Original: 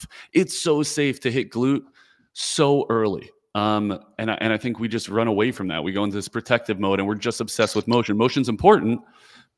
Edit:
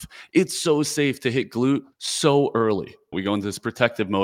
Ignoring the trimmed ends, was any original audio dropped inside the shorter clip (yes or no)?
yes